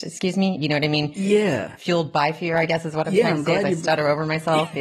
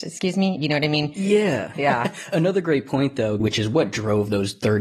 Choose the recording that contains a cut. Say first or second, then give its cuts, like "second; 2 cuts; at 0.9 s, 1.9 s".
second; 2 cuts; at 1.7 s, 3.4 s